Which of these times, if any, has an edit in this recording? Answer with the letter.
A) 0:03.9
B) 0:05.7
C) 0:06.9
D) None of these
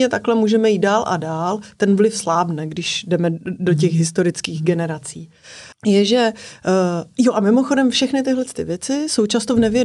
B